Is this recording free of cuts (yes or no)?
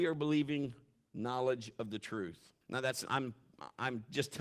no